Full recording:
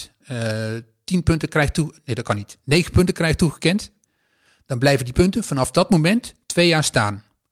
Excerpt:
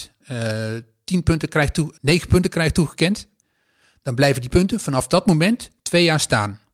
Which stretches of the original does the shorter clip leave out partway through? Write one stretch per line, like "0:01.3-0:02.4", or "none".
0:02.0-0:02.6